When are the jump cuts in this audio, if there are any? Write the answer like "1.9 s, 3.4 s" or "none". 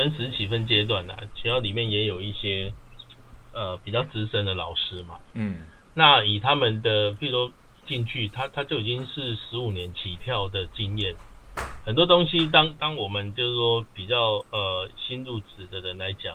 1.3 s

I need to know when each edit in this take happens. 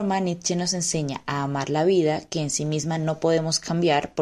none

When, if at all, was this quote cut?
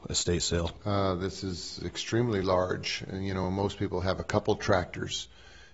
none

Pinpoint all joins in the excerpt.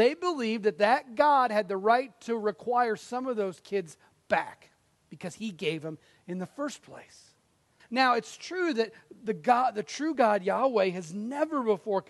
7.8 s

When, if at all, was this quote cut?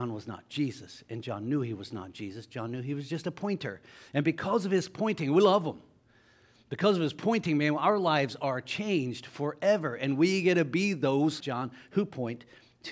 11.4 s

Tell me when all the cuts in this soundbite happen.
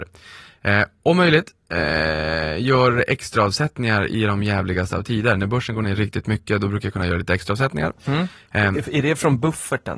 none

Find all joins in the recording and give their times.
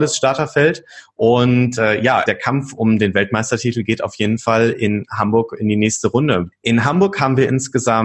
2.3 s, 6.5 s

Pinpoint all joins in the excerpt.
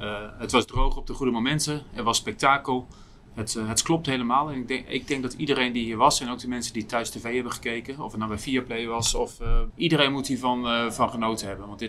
9.7 s

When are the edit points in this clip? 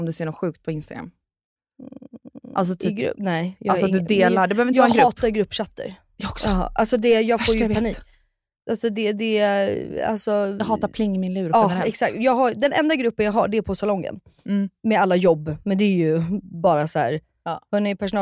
none

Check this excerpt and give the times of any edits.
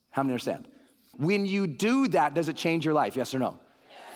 1.1 s

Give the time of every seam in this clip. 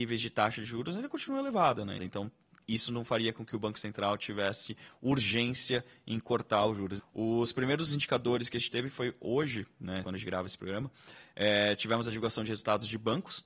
2.0 s, 7.0 s, 10.0 s

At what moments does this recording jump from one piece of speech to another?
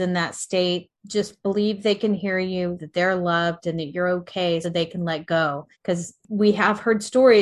2.8 s, 4.6 s, 5.7 s

